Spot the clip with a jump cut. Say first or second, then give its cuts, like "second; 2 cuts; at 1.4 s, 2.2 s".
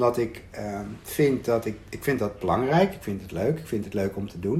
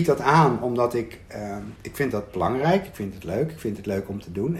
second; 1 cut; at 1.8 s